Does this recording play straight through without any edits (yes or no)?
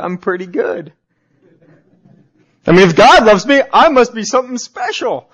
yes